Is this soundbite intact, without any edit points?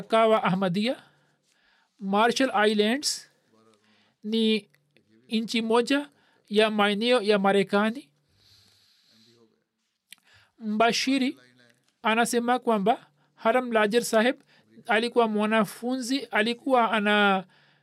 yes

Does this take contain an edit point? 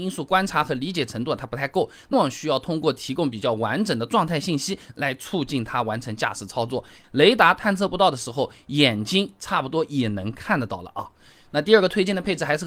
yes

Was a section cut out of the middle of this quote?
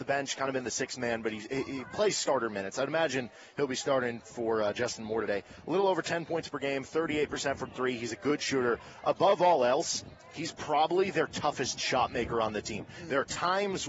no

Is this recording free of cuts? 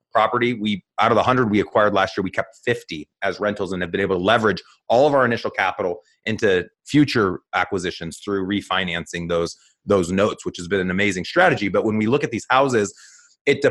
yes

